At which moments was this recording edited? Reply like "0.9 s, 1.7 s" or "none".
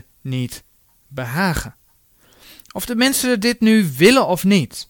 none